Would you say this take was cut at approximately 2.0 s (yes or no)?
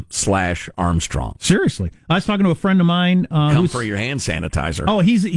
no